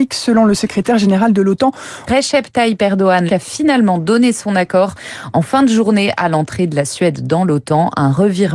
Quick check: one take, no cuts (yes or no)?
no